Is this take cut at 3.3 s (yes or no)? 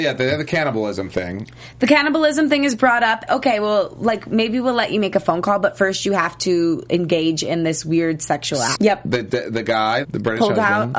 yes